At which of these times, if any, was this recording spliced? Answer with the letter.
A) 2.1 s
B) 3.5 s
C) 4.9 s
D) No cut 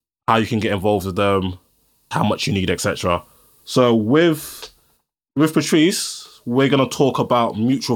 A